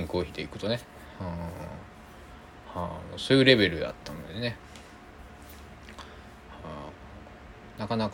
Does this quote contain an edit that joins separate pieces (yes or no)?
no